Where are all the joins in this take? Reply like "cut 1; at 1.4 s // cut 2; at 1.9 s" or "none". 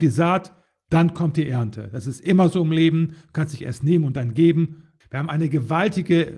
cut 1; at 5.0 s